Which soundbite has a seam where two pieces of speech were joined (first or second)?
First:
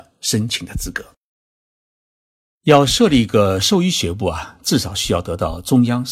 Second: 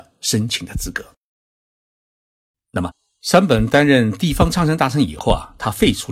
second